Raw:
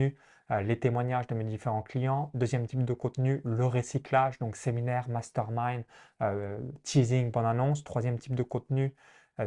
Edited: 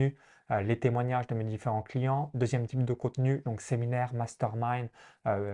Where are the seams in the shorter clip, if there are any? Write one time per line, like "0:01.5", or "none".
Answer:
0:03.4

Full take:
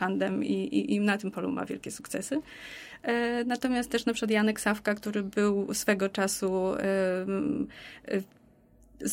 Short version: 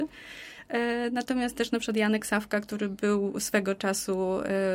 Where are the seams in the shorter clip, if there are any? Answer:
none

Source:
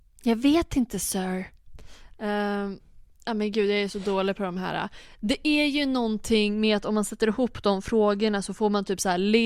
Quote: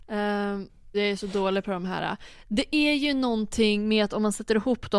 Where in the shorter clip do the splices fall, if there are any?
0:00.9

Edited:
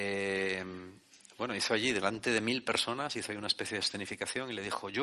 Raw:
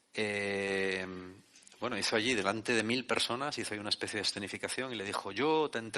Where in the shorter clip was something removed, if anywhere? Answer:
none

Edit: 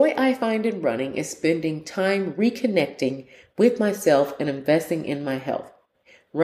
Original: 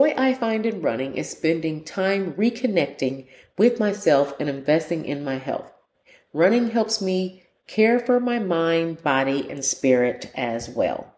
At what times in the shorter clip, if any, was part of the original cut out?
none

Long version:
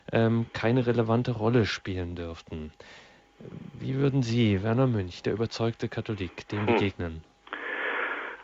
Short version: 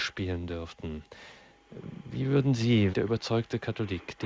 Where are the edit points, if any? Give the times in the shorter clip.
0:02.9

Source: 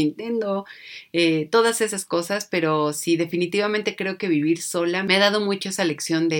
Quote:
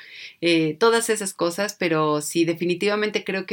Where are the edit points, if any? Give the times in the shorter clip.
none

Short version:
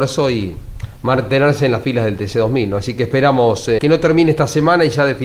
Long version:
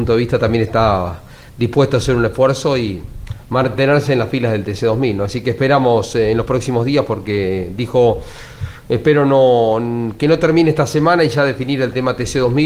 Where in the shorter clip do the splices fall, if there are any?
0:03.8

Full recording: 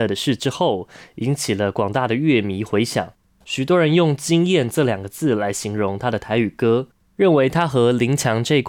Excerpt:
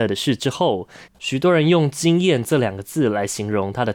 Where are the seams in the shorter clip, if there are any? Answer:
0:01.1

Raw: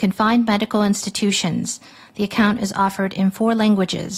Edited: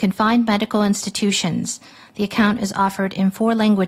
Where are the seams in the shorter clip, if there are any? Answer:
none

